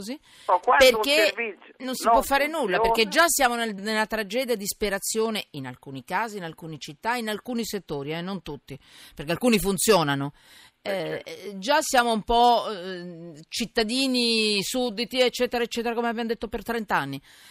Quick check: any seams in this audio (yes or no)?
yes